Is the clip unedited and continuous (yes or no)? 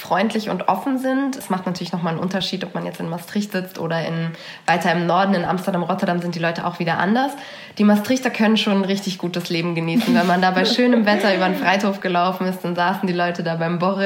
no